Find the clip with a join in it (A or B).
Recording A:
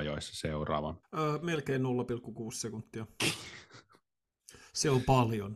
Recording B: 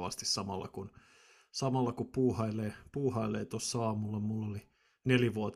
A